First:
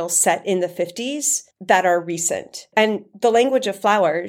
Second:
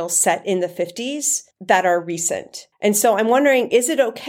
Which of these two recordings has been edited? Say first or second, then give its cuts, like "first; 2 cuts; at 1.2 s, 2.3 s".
first; 1 cut; at 2.7 s